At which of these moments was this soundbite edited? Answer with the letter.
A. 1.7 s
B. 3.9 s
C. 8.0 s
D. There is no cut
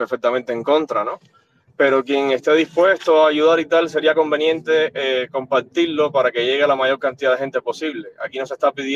D